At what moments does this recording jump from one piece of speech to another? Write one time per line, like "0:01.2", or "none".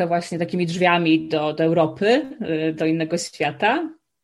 none

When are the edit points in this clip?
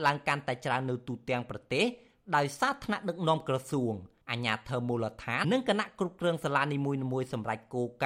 0:05.4

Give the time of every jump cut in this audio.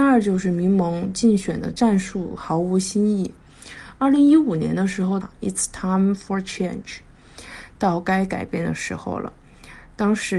0:05.2

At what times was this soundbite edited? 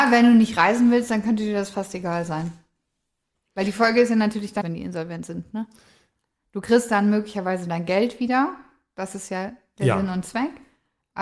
0:04.6

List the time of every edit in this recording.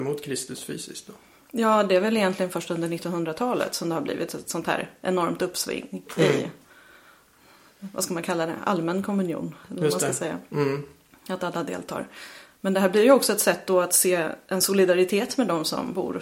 none

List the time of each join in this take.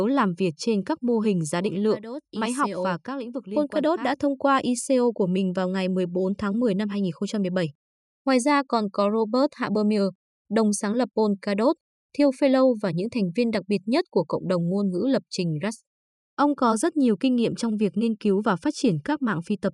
0:08.1

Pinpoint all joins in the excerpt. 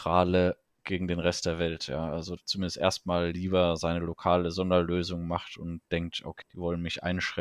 0:02.4
0:06.4

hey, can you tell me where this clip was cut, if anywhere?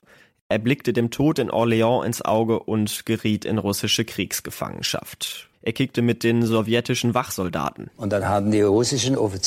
0:05.5

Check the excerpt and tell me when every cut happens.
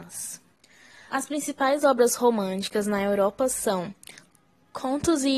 0:01.1

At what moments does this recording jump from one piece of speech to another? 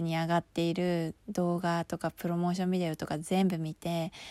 0:01.2

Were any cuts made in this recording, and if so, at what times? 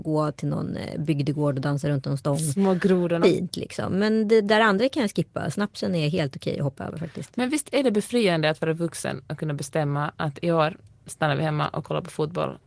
0:03.2

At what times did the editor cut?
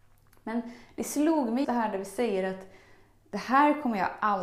0:01.6

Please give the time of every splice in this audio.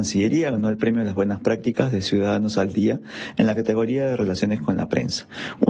none

